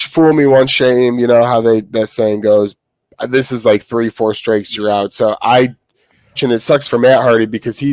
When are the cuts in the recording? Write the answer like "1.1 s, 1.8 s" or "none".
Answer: 6.4 s